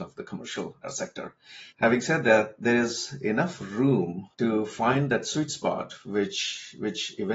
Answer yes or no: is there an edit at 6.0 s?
no